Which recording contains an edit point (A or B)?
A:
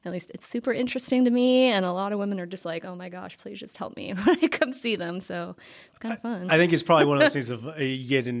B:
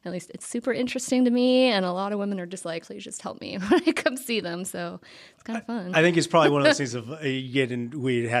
B